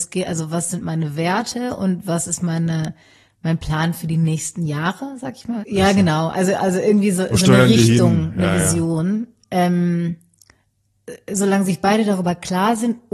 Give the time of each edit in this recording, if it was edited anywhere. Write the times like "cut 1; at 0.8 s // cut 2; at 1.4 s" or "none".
cut 1; at 5.6 s